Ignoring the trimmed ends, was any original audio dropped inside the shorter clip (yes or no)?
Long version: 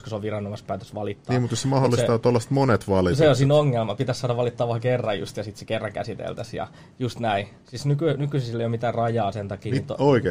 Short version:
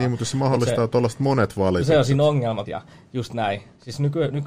yes